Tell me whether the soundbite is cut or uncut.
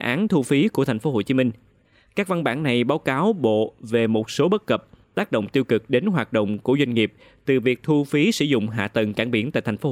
uncut